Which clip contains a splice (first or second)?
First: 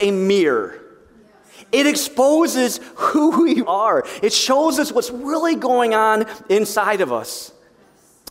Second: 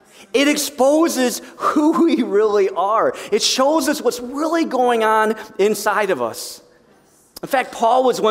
first